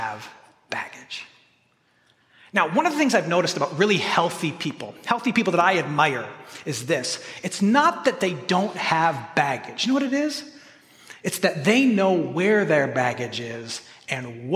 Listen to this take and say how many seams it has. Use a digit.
0